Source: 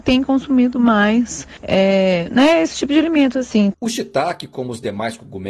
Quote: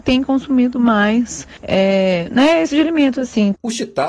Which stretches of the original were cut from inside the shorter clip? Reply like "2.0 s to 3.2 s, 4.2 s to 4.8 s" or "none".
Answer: 2.7 s to 2.9 s